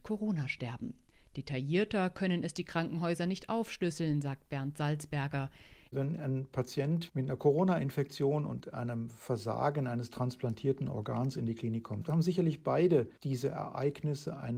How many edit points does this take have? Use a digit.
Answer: 2